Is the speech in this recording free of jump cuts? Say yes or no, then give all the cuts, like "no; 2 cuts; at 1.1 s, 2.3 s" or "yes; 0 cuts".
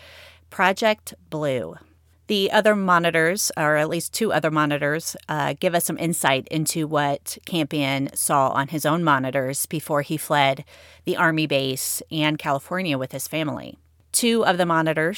yes; 0 cuts